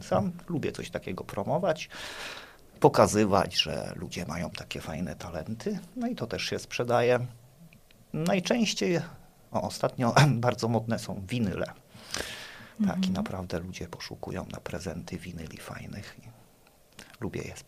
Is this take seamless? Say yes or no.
yes